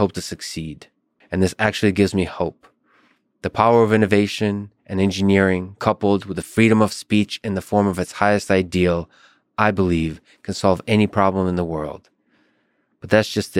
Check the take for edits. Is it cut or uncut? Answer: cut